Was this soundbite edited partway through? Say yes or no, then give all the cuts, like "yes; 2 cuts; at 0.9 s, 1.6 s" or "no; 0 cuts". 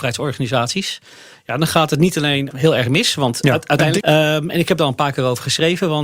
yes; 2 cuts; at 2.5 s, 4.0 s